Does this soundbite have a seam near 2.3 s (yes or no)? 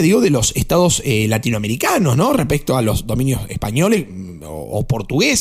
no